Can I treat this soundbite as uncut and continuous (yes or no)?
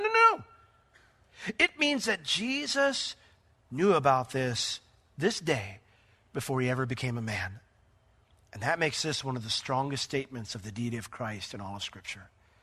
yes